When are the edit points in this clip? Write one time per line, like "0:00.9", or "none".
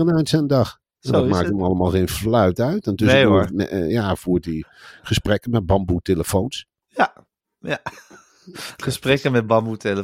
0:03.5

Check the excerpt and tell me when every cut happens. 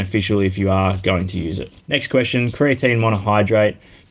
0:01.8

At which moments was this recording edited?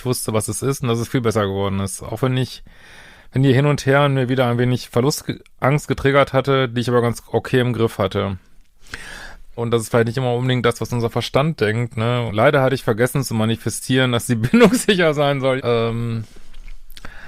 0:09.6
0:12.3
0:15.6

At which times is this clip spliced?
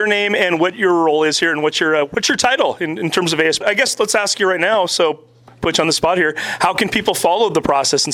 0:03.6

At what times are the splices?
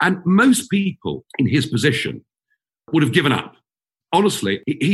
0:01.3
0:04.0

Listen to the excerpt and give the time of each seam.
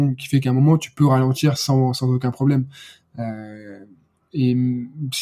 none

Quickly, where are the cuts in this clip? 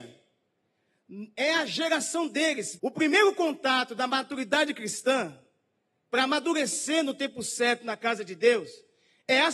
0:02.8

